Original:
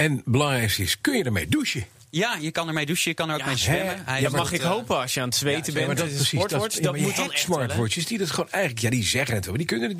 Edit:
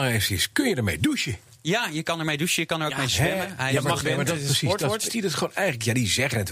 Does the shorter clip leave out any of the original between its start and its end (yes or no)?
yes